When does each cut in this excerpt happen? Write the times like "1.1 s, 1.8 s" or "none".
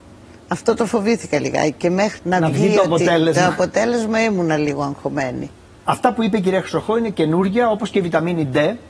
2.2 s